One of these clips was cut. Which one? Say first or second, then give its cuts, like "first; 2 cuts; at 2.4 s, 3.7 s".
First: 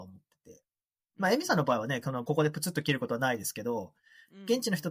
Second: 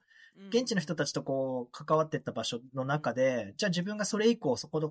first; 1 cut; at 2.3 s